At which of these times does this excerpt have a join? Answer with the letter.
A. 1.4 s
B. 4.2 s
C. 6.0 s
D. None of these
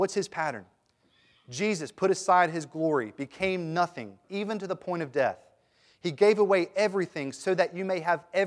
B